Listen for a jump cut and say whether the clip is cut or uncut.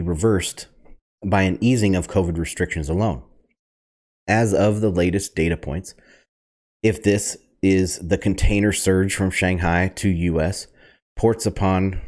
uncut